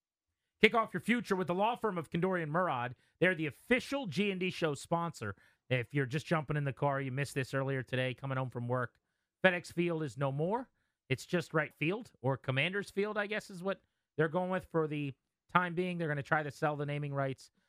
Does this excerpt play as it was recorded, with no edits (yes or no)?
no